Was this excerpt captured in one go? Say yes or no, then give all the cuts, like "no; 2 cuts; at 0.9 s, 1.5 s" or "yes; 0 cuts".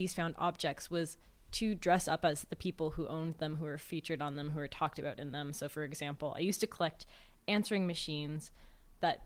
yes; 0 cuts